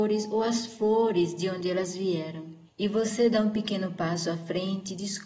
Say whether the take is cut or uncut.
cut